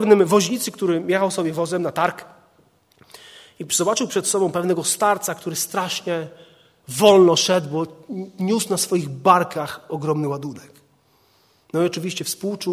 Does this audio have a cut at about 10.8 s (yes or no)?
no